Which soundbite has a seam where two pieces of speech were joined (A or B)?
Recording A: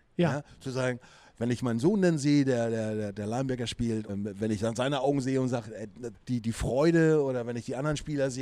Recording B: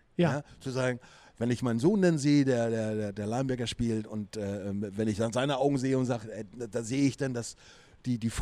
A